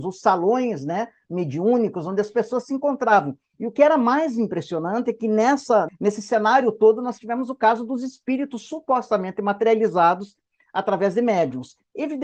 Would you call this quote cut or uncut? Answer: cut